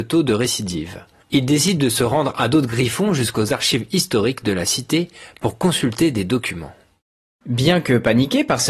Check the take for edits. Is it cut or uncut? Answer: uncut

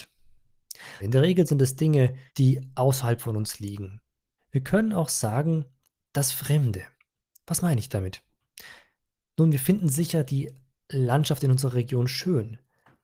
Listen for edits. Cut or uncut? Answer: cut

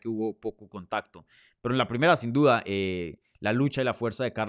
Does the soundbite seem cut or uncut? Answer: uncut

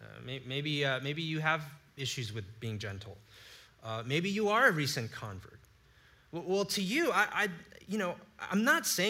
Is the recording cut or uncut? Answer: uncut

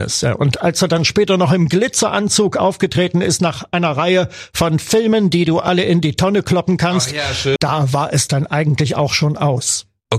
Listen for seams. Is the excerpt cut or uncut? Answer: cut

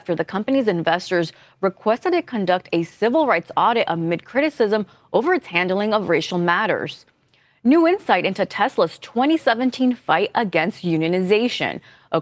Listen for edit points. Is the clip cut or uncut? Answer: uncut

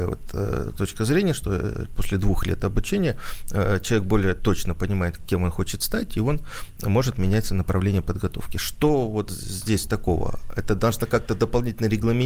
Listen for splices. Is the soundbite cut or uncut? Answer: uncut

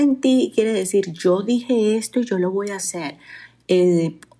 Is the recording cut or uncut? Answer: uncut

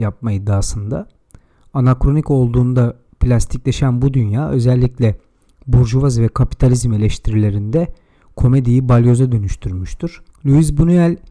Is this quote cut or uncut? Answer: uncut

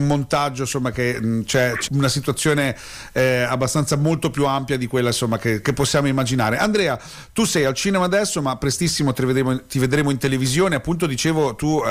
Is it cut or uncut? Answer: cut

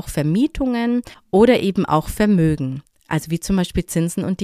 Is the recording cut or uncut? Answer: uncut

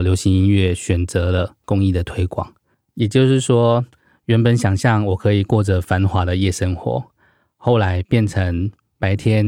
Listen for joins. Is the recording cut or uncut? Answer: uncut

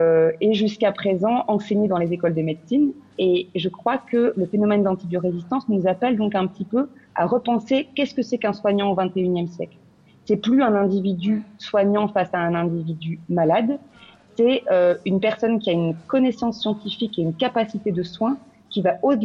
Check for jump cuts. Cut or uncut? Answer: uncut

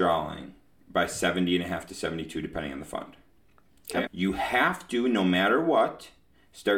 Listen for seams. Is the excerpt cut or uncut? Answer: cut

